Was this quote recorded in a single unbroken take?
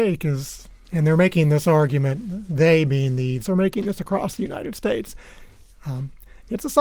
no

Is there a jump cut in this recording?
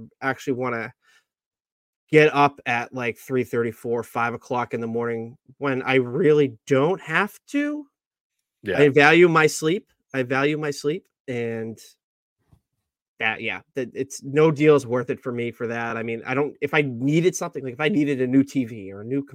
no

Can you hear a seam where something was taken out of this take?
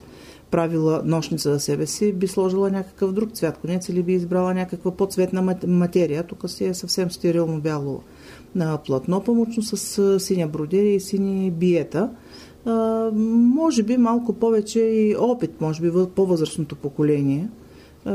no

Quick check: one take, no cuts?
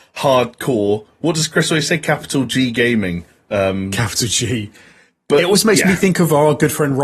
yes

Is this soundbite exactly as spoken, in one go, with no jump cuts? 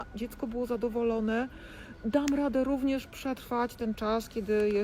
yes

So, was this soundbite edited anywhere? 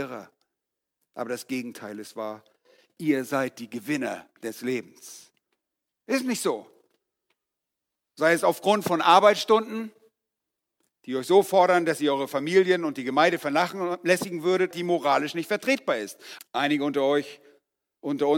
yes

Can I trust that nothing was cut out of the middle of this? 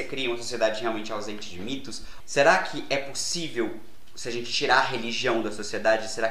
no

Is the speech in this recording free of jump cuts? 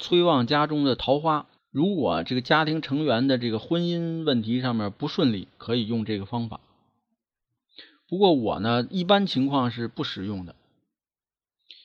yes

